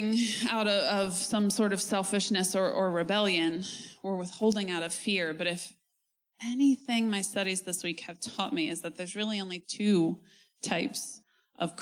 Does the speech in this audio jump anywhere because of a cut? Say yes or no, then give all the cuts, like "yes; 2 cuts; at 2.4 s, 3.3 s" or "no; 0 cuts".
no; 0 cuts